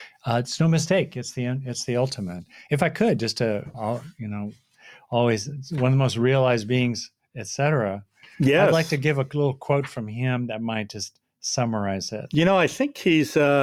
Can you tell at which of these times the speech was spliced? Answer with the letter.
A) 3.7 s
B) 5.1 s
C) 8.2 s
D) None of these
A